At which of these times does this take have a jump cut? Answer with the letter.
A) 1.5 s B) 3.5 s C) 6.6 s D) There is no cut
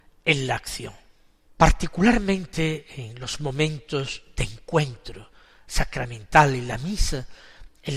A